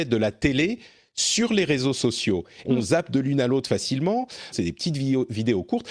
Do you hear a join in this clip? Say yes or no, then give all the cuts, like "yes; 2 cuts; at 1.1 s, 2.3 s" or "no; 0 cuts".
yes; 2 cuts; at 2.6 s, 4.5 s